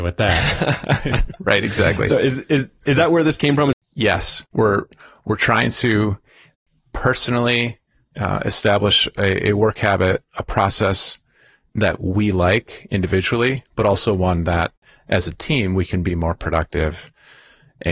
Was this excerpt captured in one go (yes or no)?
no